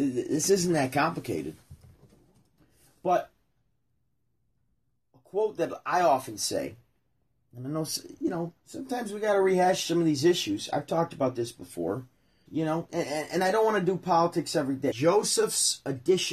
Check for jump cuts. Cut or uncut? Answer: cut